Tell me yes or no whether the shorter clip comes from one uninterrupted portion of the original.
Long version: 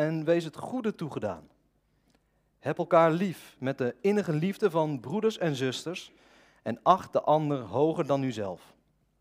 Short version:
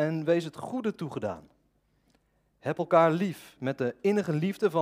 yes